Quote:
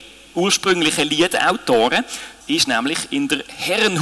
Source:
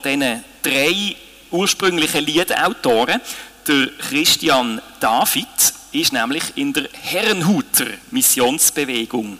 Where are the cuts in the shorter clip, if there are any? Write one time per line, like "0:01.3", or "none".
0:02.4